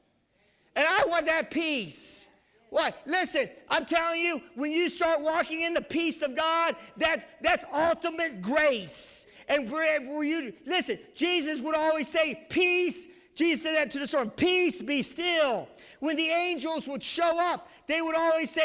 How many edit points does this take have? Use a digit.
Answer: 0